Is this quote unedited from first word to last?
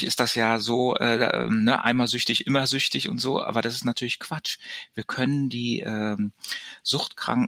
yes; 0 cuts

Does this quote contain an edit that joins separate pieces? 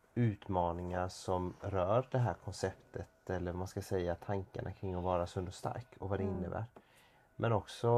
no; 0 cuts

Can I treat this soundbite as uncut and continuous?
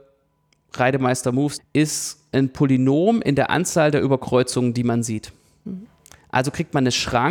no; 1 cut; at 1.6 s

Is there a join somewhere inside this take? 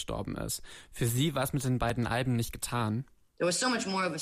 no; 0 cuts

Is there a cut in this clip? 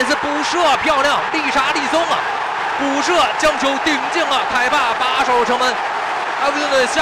no; 0 cuts

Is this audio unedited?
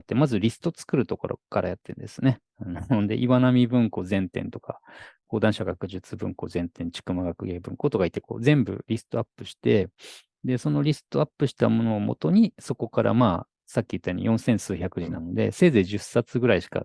yes; 0 cuts

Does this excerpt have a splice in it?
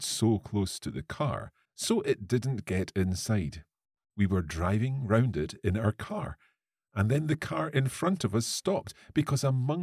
yes; 2 cuts; at 1.7 s, 4.1 s

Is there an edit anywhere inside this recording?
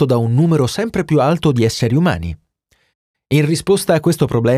no; 0 cuts

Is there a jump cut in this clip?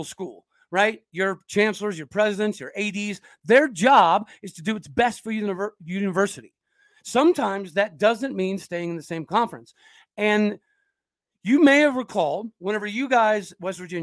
no; 0 cuts

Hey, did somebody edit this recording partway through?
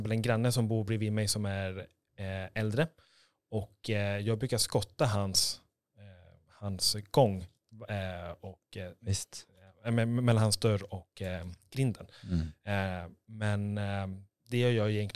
no; 0 cuts

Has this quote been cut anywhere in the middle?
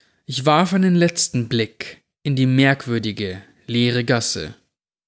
no; 0 cuts

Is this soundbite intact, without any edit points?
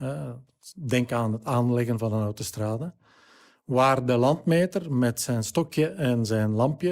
yes; 0 cuts

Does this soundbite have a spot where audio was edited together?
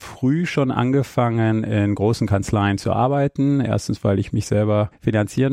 no; 0 cuts

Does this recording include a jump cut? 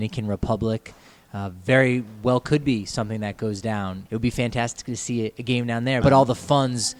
yes; 2 cuts; at 4.1 s, 6.0 s

